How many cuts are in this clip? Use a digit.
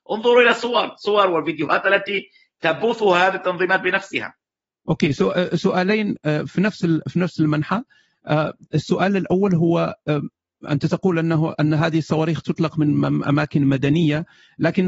0